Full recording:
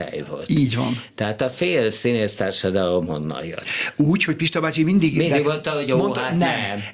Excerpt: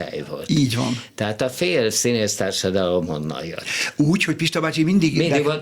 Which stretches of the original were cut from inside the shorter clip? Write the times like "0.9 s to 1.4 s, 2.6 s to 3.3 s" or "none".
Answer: none